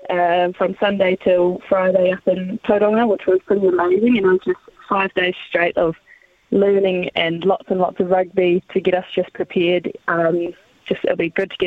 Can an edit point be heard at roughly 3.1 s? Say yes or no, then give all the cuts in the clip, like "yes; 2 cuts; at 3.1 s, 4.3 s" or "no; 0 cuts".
no; 1 cut; at 10.0 s